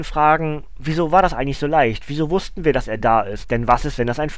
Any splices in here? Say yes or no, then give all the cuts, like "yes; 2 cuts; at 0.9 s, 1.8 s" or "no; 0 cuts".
yes; 1 cut; at 3.4 s